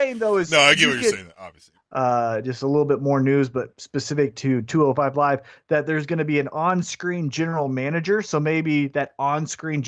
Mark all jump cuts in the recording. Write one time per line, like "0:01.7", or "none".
0:01.7